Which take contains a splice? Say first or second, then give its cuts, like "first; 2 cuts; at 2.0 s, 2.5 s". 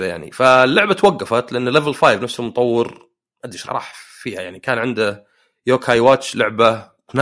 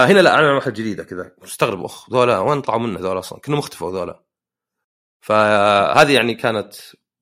first; 1 cut; at 3.6 s